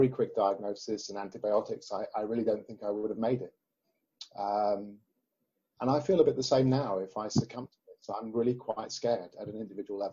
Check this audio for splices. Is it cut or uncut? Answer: uncut